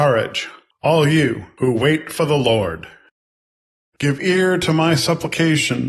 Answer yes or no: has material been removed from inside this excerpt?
yes